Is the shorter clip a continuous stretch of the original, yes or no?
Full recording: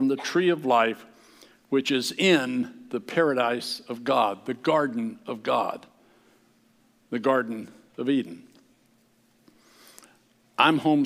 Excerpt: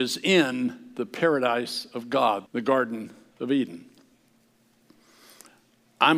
no